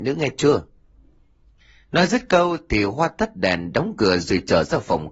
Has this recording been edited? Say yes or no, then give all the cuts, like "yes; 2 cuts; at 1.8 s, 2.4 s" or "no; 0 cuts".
no; 0 cuts